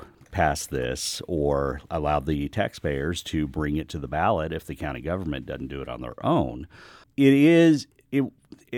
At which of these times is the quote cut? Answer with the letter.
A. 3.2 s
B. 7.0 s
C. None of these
B